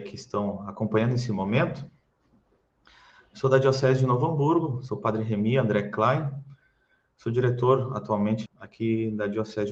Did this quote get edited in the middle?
yes; 1 cut; at 8.5 s

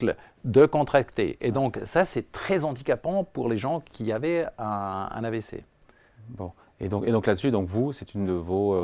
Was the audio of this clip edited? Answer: no; 0 cuts

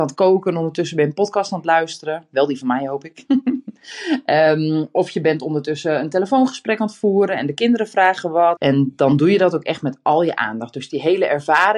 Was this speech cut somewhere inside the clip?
yes; 1 cut; at 8.6 s

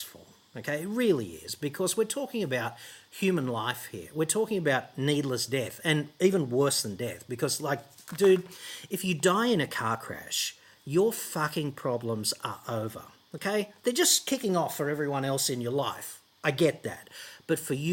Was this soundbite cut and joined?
no; 0 cuts

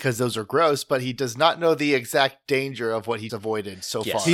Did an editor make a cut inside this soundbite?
yes; 1 cut; at 3.3 s

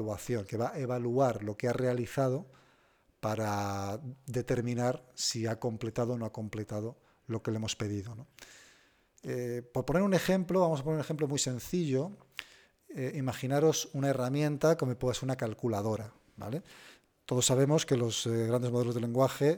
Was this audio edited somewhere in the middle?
no; 0 cuts

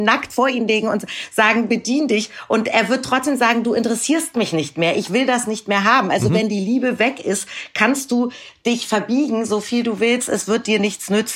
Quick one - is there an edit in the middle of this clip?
no; 0 cuts

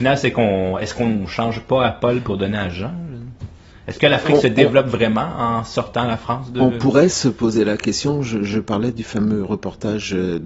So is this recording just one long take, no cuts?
yes; 0 cuts

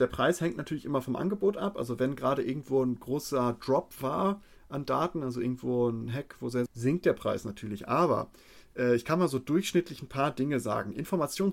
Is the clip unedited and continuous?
no; 1 cut; at 6.7 s

